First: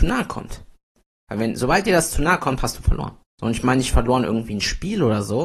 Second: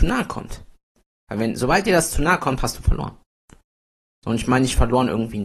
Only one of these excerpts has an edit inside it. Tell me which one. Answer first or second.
first